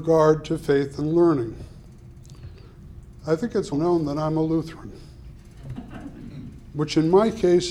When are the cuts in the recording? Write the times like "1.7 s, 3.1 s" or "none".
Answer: 3.7 s